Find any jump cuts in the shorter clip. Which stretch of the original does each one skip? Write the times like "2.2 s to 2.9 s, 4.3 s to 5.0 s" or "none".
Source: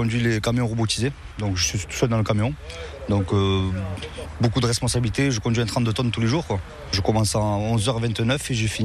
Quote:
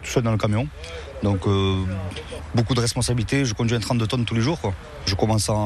none